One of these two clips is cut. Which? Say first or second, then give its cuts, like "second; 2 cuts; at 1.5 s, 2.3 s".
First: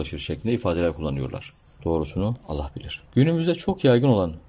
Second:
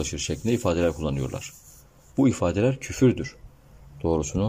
first; 2 cuts; at 1.8 s, 3.1 s